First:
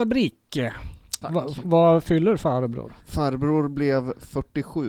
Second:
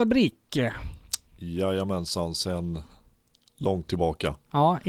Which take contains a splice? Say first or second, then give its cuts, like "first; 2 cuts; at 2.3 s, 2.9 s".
first; 2 cuts; at 1.2 s, 3.0 s